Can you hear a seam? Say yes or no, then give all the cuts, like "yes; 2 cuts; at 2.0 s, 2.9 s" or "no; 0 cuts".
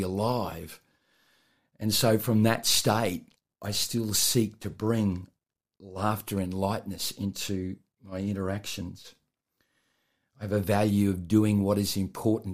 yes; 1 cut; at 3.5 s